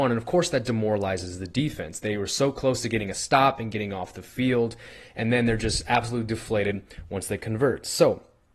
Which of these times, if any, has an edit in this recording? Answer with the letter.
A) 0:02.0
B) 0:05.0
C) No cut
C